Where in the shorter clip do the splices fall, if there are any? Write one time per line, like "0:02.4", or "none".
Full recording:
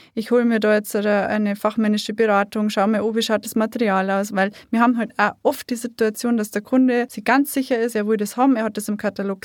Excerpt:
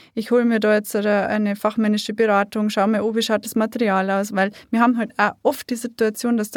none